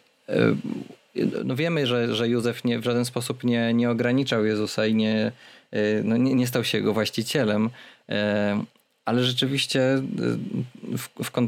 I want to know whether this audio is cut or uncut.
uncut